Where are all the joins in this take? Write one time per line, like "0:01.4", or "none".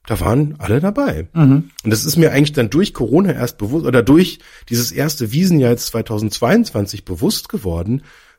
none